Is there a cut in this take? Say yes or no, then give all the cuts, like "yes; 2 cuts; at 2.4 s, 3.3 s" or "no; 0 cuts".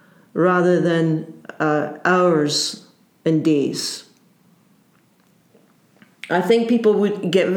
no; 0 cuts